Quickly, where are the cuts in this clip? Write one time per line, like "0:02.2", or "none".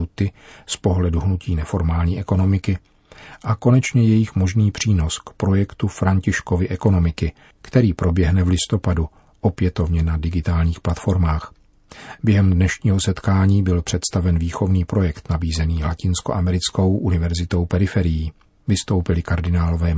none